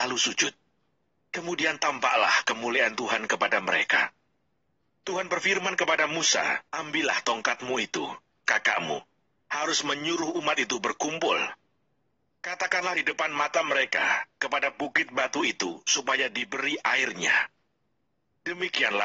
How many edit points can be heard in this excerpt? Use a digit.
2